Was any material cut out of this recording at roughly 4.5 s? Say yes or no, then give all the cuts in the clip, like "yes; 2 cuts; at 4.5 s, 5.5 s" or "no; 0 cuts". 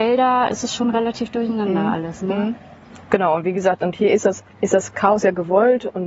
yes; 1 cut; at 4.5 s